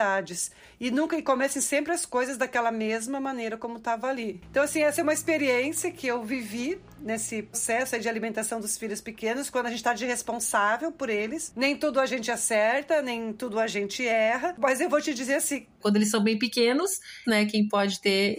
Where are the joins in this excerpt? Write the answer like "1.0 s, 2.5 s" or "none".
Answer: 7.5 s, 15.8 s, 17.2 s